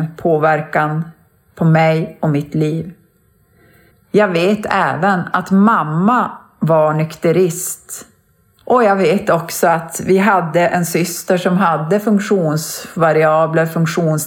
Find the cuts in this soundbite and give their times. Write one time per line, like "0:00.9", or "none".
0:03.9
0:08.6